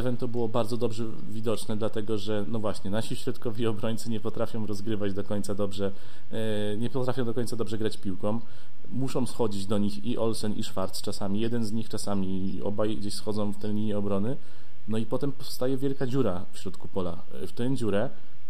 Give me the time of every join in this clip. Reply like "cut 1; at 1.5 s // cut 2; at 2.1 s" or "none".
cut 1; at 13.0 s